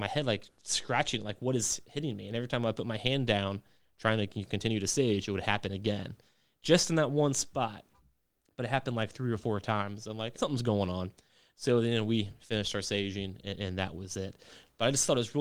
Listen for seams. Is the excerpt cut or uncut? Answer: cut